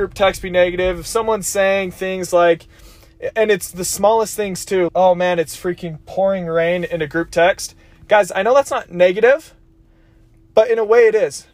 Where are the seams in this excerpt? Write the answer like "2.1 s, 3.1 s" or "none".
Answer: 4.9 s